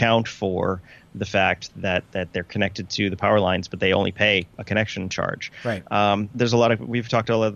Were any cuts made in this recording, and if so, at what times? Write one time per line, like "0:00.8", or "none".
0:06.3